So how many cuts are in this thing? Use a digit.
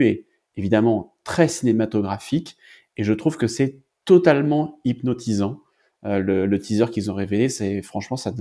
0